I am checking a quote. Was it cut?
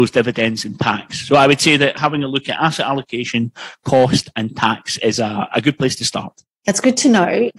no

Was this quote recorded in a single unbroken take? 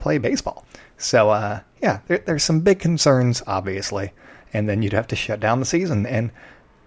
no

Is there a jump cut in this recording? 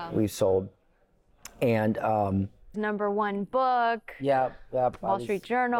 yes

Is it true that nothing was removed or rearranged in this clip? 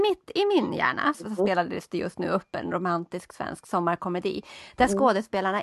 no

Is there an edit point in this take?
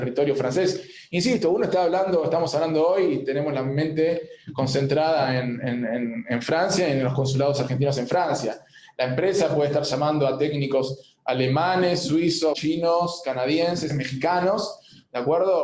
yes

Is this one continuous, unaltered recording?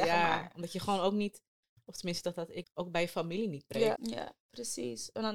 no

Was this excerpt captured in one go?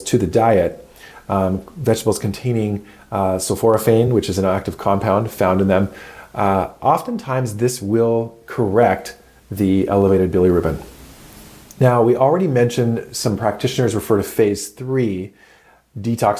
yes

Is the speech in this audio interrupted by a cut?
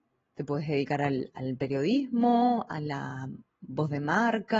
no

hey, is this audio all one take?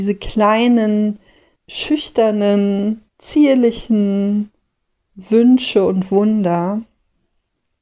no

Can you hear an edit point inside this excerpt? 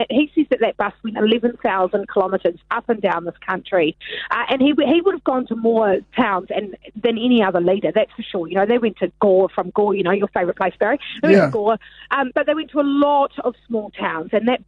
no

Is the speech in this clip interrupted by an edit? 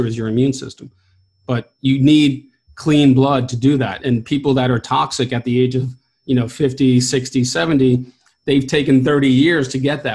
yes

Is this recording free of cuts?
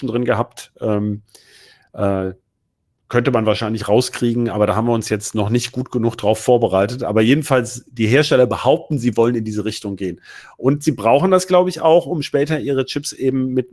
yes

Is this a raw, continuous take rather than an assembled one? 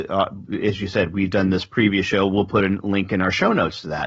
yes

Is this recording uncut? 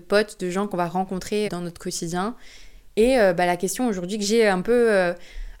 no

